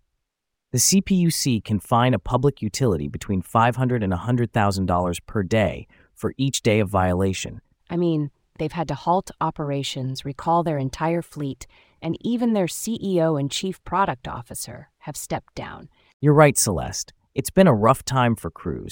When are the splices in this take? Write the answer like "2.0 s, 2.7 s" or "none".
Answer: 7.8 s